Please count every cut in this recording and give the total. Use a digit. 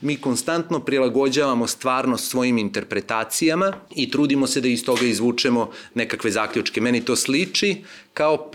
1